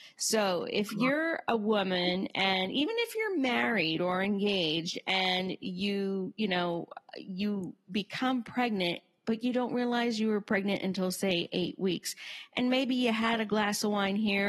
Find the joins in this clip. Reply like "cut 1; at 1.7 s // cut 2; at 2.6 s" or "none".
none